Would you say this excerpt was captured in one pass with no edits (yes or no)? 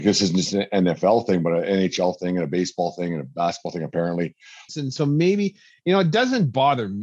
no